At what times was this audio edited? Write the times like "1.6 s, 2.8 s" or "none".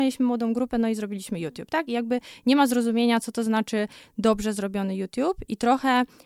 none